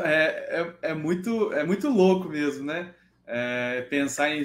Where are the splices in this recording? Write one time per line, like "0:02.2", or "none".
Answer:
none